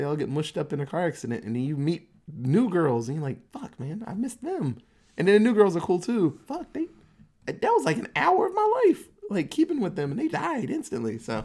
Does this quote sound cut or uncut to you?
cut